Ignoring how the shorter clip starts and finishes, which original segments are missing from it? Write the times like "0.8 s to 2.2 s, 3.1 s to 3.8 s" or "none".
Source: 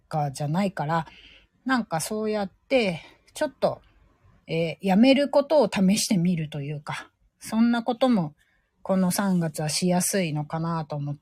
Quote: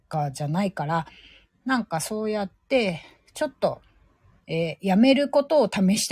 none